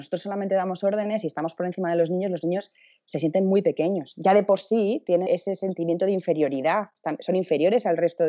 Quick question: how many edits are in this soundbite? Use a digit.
1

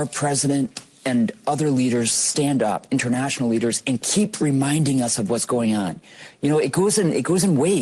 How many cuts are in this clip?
0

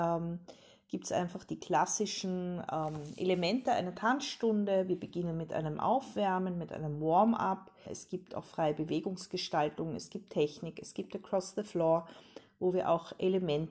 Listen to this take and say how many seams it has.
1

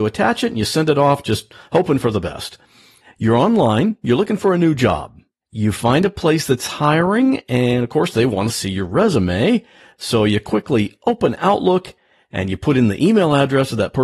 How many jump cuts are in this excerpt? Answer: 1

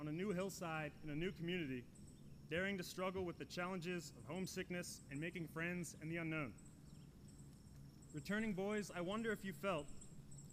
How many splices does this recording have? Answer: 0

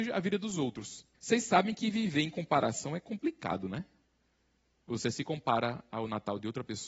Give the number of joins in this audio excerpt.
1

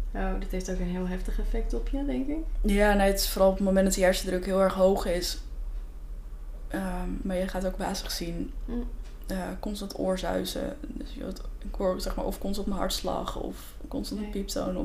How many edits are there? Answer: 1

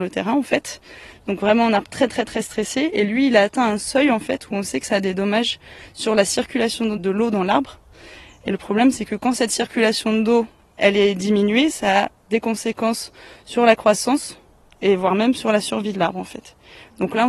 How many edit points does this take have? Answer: 1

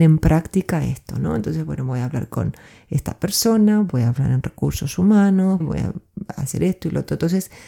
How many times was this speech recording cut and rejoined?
1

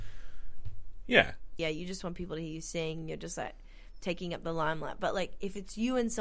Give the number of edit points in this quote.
1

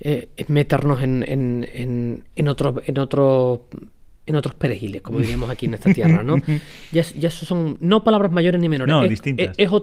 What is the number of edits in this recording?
0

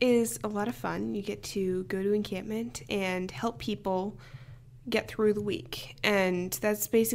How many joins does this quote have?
0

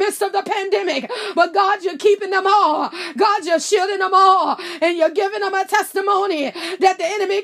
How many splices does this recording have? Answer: 0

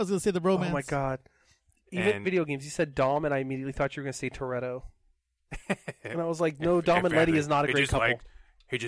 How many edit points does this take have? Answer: 1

